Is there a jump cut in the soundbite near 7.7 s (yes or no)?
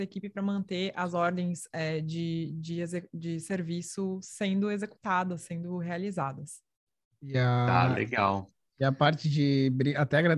no